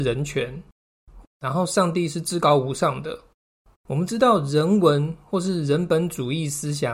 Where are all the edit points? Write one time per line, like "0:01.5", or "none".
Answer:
0:01.2
0:03.7